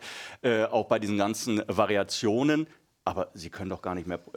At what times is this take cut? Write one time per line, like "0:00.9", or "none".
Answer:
none